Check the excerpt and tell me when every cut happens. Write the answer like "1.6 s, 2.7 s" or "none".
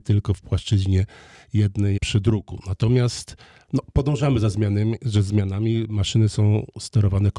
2.0 s

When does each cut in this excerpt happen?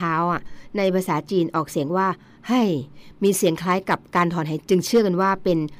4.6 s

